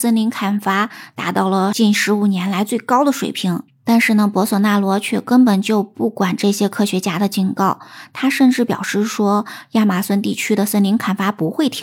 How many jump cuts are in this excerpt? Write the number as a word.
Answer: one